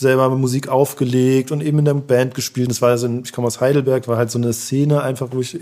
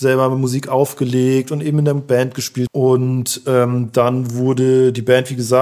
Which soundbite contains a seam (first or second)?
second